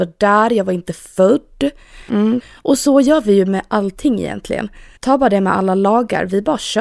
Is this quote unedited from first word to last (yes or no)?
no